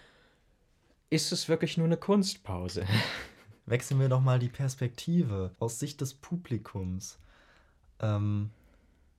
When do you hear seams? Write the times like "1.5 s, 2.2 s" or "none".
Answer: 5.5 s